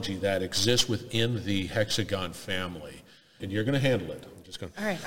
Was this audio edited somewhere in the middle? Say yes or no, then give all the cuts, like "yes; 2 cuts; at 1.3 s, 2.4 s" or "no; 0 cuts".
yes; 1 cut; at 3.4 s